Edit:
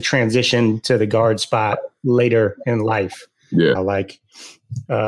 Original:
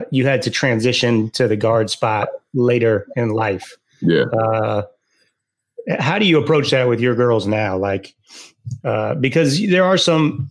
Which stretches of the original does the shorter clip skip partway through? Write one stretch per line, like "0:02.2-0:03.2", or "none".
0:04.3-0:07.7